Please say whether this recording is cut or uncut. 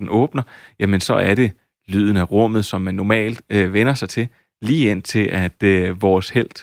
uncut